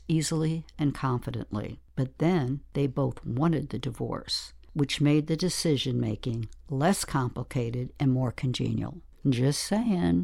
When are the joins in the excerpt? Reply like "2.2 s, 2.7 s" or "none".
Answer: 9.1 s